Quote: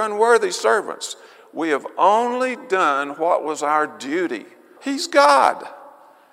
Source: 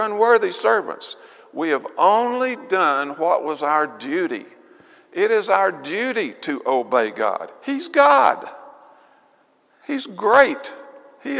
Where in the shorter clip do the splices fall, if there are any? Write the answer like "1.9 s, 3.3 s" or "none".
4.8 s